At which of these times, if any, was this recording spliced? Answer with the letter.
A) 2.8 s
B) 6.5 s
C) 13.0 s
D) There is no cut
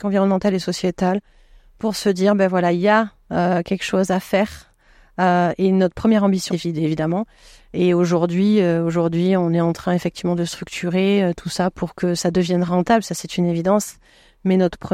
B